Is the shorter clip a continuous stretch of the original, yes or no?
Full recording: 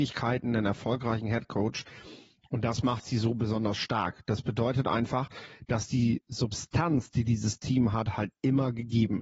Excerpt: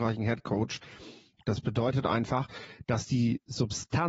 no